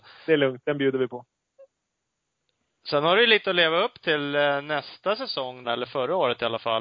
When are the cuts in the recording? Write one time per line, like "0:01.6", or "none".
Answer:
0:05.6

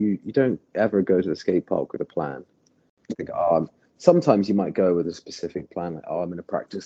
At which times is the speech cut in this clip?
none

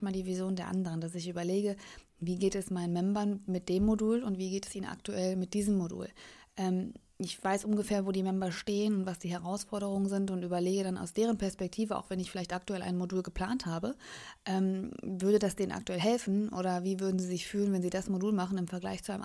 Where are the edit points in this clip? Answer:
none

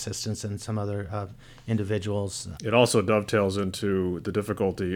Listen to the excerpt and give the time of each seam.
0:02.5

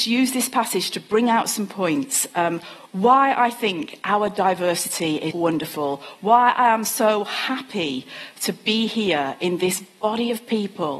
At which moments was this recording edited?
0:05.3

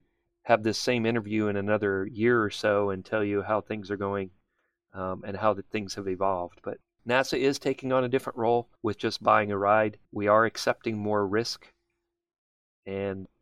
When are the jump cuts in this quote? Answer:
0:08.8
0:10.1

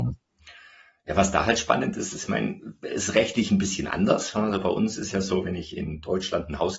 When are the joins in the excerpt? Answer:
none

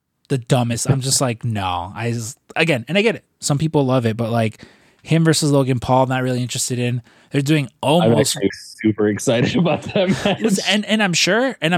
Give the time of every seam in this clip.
0:08.5

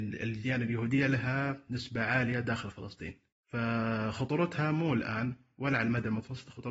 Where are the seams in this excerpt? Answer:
0:03.4

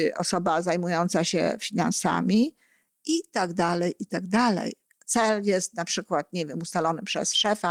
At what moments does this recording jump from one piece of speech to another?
0:04.8

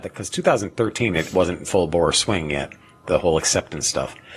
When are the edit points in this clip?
none

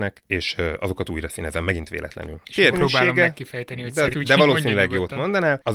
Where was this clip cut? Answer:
0:02.7
0:04.1

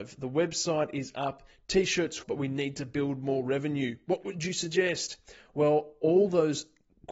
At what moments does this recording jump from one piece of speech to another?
0:02.2

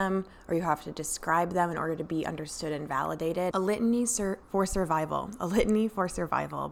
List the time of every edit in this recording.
0:03.5

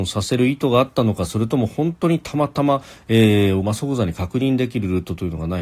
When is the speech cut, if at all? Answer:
0:03.6

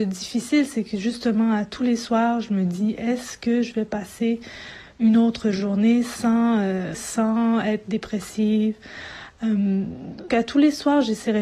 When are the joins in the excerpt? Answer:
0:06.9
0:10.3

